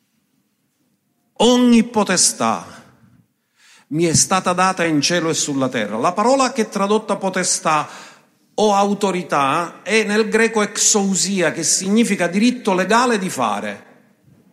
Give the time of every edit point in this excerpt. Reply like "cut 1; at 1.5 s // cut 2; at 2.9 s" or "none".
none